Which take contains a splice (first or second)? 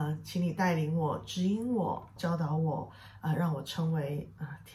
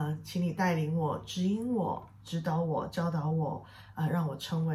first